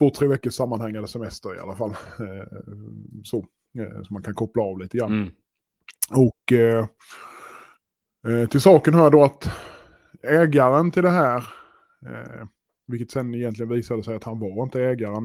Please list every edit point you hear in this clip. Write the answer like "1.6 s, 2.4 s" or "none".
none

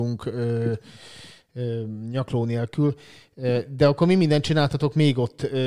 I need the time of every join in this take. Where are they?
none

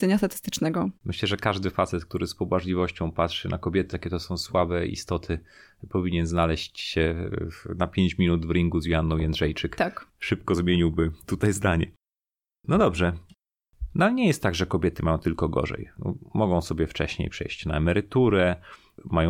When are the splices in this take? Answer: 1.0 s, 3.9 s

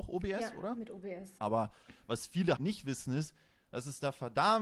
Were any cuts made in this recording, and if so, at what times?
1.4 s, 2.6 s

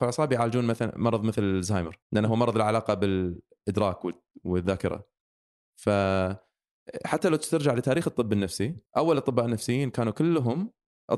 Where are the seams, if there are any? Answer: 2.0 s, 8.9 s

